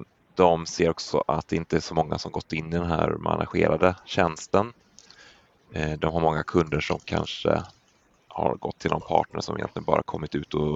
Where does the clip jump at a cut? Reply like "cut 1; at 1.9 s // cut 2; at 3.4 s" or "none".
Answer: none